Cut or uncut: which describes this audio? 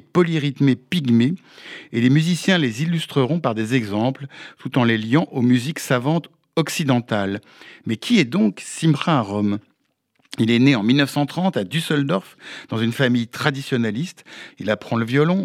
cut